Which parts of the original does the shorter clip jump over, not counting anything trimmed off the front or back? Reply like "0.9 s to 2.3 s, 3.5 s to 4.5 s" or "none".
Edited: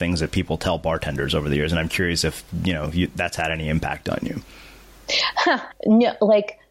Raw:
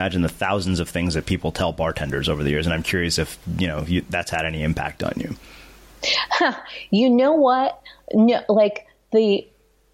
6.7 s to 8.0 s